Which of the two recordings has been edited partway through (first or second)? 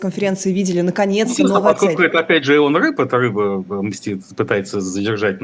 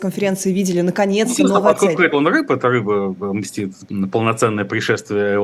second